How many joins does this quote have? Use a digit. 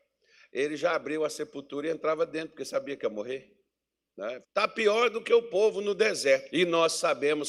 2